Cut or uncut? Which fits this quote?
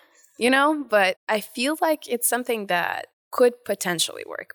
uncut